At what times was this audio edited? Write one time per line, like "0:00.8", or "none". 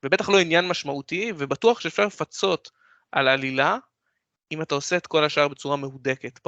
none